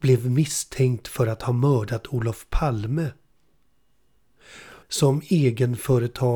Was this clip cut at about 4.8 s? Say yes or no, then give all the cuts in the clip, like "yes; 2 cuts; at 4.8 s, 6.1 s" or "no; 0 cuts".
yes; 1 cut; at 4.8 s